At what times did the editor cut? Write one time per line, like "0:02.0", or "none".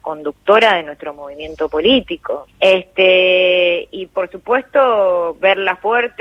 0:02.5

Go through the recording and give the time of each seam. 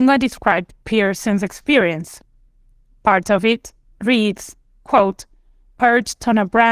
none

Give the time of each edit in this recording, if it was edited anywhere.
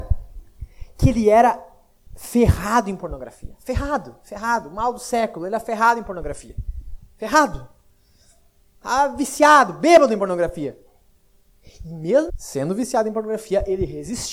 0:12.3

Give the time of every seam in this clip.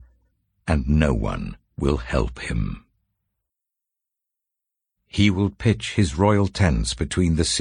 0:05.0

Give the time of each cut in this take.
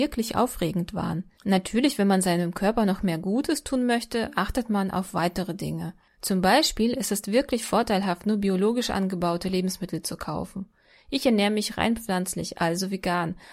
0:01.4

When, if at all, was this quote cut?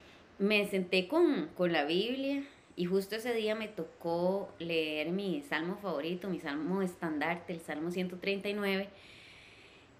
none

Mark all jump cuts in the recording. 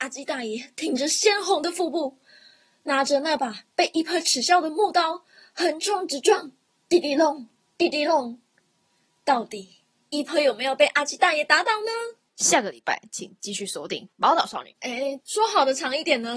0:15.2

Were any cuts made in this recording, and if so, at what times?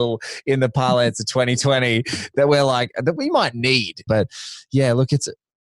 0:04.1

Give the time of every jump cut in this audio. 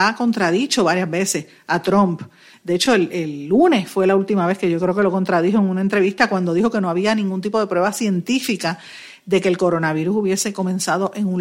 none

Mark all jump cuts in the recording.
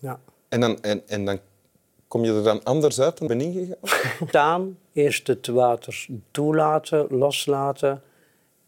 0:03.3
0:04.3

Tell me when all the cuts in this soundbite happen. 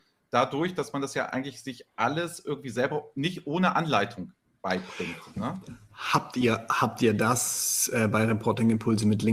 none

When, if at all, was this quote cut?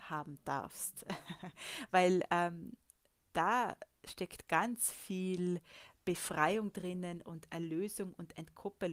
none

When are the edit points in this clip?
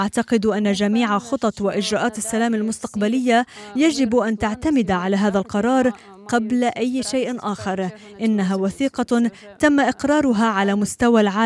none

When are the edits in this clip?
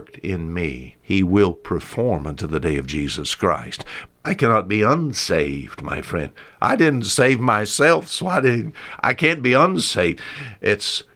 0:00.9
0:04.1

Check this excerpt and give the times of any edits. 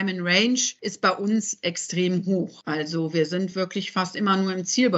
none

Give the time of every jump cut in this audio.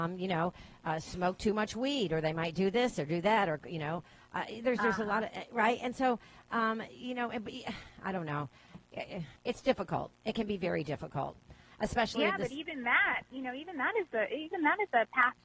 0:09.4

